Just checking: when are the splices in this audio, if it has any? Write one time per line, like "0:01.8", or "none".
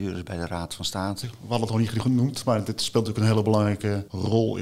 0:01.2